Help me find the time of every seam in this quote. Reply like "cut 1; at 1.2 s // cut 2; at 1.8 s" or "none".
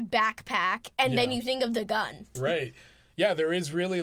cut 1; at 2.3 s